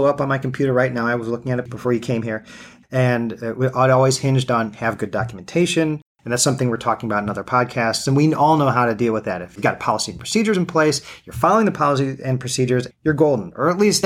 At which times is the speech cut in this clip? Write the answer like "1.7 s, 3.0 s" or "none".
2.8 s, 12.9 s